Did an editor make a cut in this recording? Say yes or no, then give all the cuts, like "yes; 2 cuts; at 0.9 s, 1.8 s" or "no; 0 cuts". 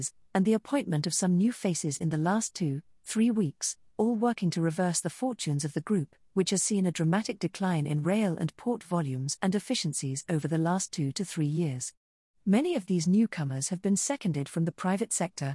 no; 0 cuts